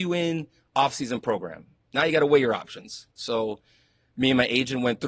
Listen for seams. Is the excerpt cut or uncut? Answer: uncut